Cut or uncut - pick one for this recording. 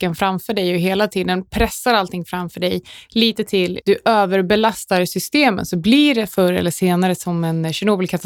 cut